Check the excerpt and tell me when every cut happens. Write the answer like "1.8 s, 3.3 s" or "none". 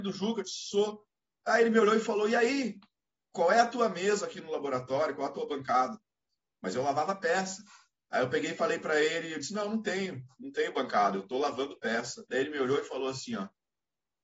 none

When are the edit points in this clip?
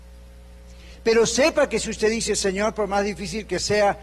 none

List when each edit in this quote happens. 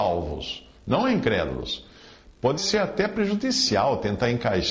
2.6 s

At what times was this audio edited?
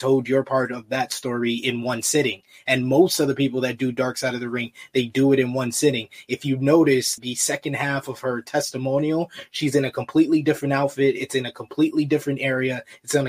7.2 s

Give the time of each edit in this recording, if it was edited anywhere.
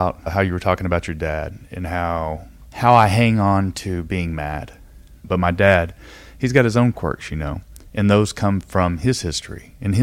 5.2 s

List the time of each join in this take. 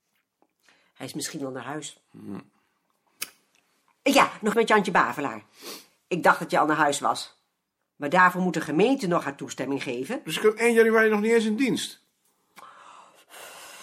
4.5 s, 7.9 s

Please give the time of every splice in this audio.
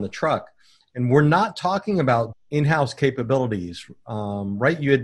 2.3 s

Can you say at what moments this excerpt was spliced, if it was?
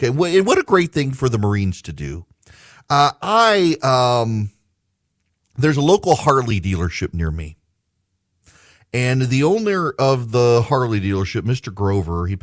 none

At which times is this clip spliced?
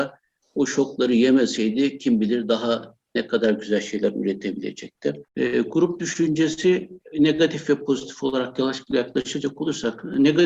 5.3 s

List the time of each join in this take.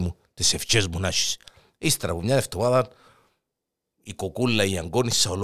none

